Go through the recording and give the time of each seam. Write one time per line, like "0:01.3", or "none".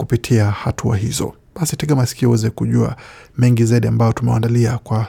none